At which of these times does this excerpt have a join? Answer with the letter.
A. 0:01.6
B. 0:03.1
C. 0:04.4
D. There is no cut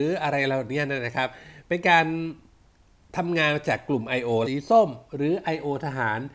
C